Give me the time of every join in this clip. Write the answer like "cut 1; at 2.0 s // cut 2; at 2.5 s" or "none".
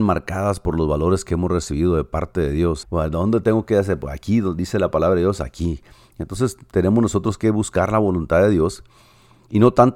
cut 1; at 2.8 s